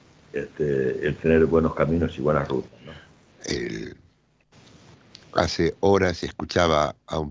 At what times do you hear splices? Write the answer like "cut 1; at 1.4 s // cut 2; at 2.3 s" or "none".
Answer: cut 1; at 3.3 s